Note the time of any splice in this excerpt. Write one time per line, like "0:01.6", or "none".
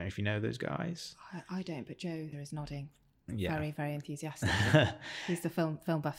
0:02.3